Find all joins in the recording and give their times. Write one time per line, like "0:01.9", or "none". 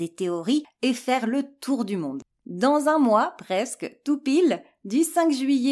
0:02.3